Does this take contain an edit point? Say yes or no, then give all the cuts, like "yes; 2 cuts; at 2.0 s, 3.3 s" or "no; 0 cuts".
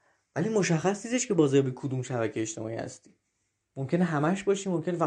no; 0 cuts